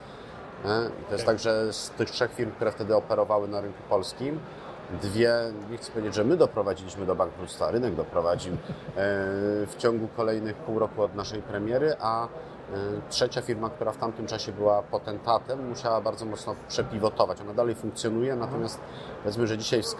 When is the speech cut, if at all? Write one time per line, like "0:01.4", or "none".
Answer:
0:00.9